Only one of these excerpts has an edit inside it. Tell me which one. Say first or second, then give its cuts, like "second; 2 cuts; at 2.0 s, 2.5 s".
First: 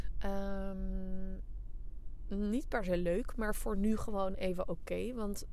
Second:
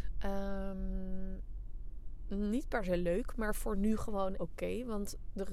second; 1 cut; at 4.3 s